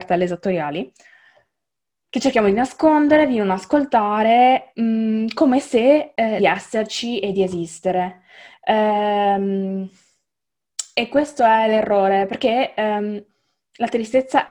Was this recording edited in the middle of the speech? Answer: yes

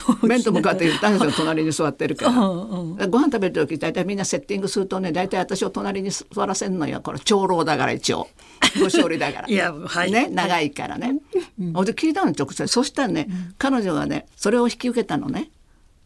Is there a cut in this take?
yes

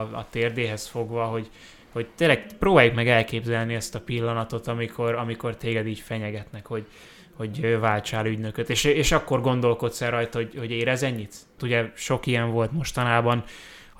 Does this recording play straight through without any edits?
no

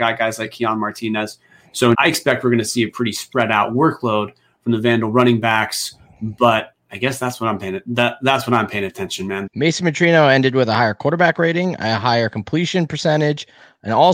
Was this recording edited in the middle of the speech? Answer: yes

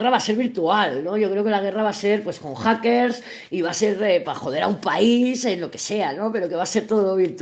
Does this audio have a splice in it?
no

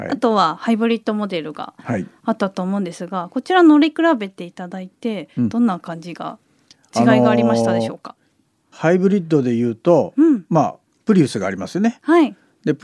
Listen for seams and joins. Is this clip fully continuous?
yes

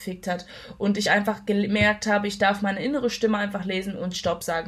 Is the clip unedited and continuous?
yes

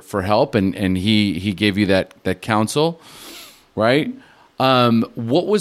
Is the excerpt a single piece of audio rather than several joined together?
yes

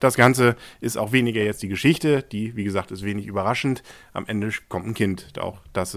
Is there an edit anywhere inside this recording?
no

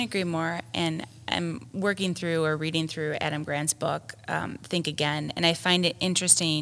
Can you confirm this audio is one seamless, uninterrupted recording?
yes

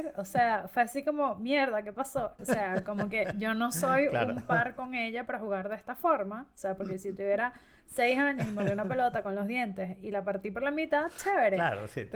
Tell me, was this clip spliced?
yes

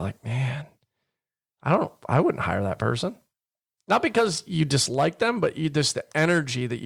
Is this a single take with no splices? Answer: yes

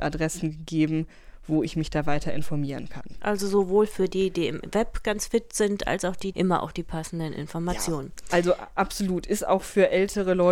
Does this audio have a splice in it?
yes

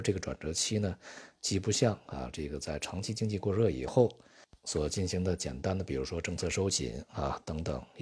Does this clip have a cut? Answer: no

